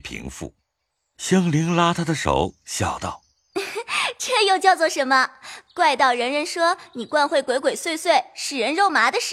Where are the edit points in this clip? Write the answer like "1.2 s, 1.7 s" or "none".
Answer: none